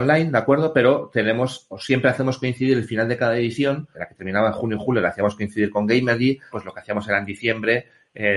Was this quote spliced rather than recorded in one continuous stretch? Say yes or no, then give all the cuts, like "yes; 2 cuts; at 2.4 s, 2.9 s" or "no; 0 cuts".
yes; 2 cuts; at 3.9 s, 6.5 s